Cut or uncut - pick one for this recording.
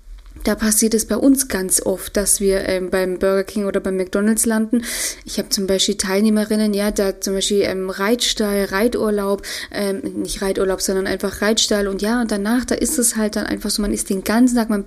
uncut